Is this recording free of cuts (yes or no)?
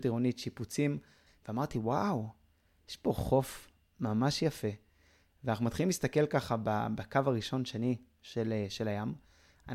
no